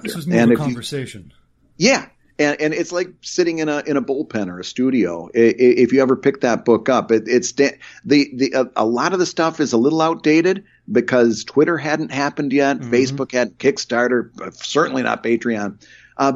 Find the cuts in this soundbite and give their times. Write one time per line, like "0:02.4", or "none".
none